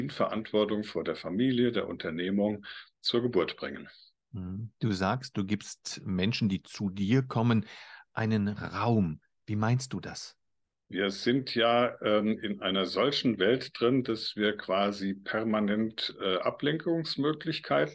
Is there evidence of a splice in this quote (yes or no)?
no